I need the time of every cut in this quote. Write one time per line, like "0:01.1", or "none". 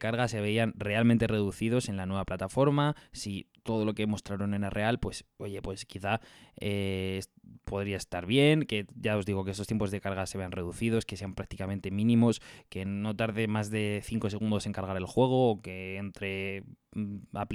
none